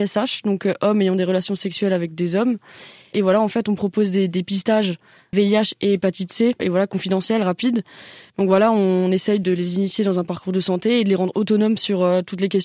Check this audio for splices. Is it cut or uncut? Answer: cut